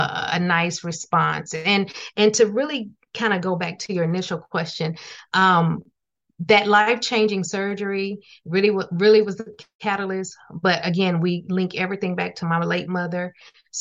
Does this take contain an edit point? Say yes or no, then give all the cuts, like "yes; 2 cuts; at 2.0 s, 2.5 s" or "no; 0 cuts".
no; 0 cuts